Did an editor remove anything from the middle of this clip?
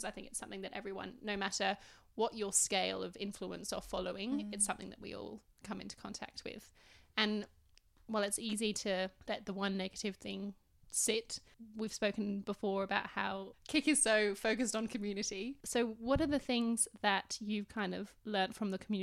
no; 0 cuts

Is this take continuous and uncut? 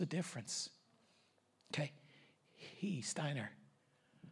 yes; 0 cuts

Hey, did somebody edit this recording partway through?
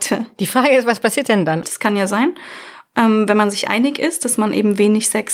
yes; 1 cut; at 1.6 s

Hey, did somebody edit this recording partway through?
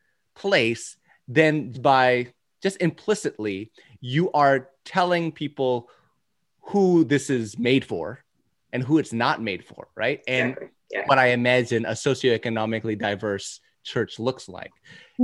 yes; 2 cuts; at 1.7 s, 11.1 s

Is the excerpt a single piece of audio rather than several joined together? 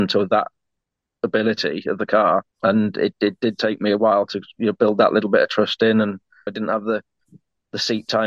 no; 2 cuts; at 2.5 s, 6.5 s

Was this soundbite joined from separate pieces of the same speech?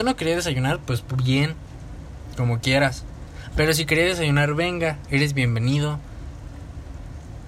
no; 0 cuts

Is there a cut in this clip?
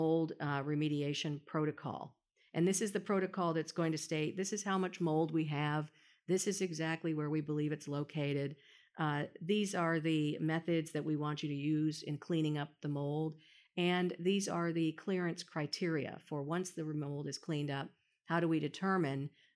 no; 0 cuts

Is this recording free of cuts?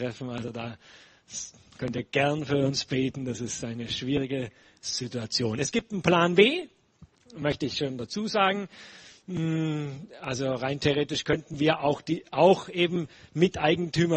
yes; 0 cuts

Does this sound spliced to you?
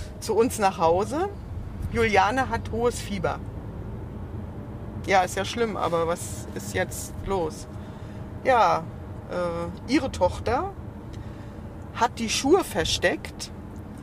no; 0 cuts

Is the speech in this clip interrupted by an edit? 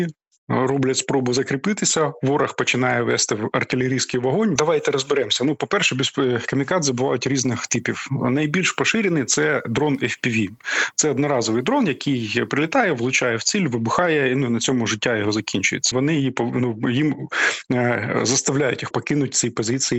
yes; 3 cuts; at 4.6 s, 15.9 s, 18.9 s

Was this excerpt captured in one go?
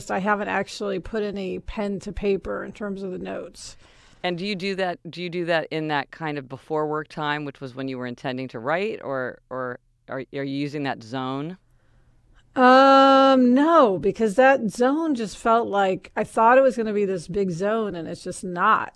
yes; 0 cuts

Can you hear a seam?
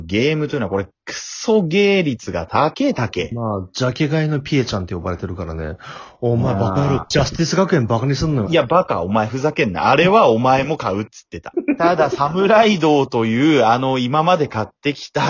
yes; 2 cuts; at 8.5 s, 11.5 s

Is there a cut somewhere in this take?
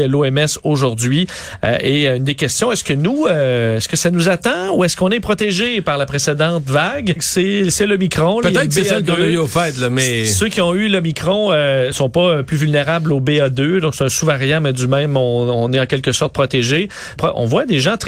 yes; 3 cuts; at 7.2 s, 11.9 s, 17.2 s

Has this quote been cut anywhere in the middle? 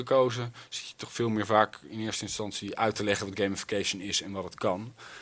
no; 0 cuts

